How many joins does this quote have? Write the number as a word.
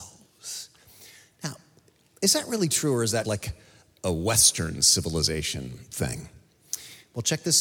one